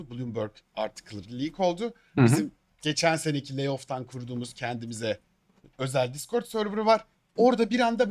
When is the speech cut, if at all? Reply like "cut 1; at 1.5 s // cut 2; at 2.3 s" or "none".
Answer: none